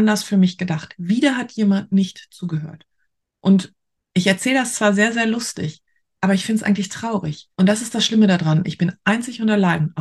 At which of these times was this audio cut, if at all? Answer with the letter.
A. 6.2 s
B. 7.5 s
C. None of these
B